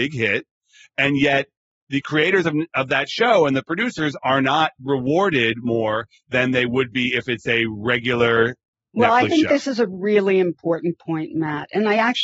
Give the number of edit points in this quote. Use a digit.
0